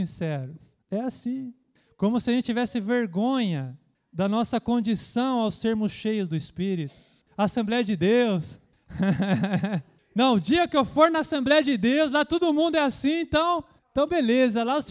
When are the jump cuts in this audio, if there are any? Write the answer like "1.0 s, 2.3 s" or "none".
7.3 s